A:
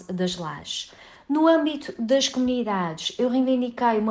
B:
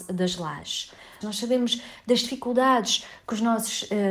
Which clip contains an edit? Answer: B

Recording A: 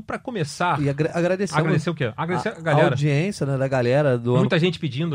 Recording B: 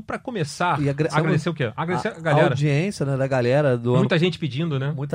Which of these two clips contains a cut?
B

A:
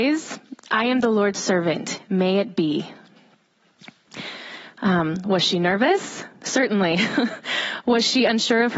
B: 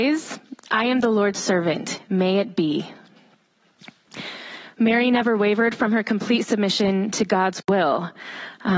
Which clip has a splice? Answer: A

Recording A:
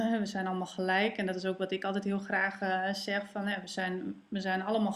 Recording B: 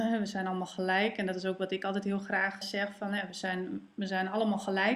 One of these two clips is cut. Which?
B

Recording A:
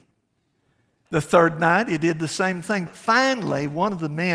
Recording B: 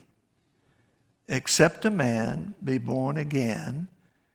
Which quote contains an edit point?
A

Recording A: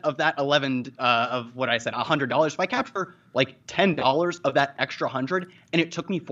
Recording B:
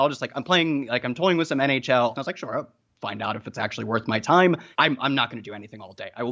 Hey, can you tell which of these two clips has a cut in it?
B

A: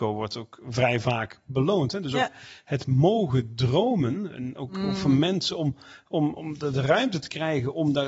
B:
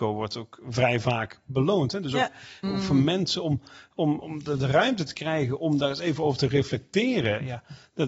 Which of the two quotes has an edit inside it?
B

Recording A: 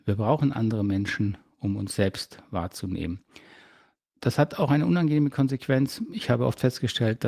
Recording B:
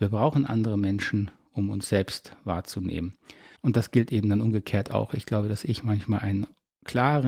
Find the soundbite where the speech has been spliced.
B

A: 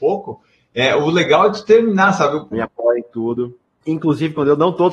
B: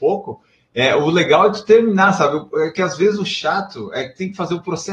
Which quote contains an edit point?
A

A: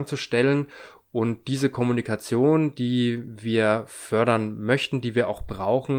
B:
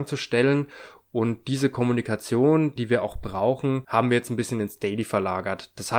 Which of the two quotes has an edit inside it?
B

